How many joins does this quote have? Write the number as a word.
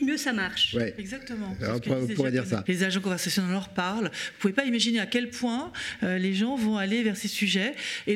one